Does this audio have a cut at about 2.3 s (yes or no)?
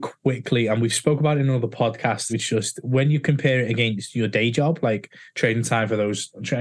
yes